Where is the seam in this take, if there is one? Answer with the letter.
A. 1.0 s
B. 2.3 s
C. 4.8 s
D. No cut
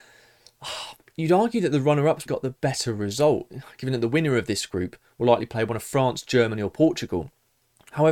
B